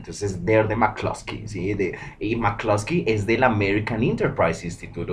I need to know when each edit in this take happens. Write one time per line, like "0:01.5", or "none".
none